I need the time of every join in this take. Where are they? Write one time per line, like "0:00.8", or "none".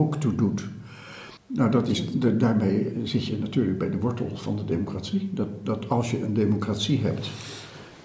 0:01.4